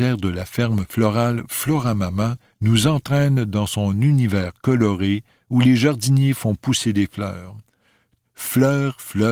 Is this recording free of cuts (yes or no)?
no